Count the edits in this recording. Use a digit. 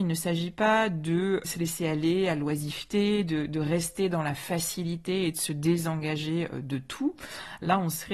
1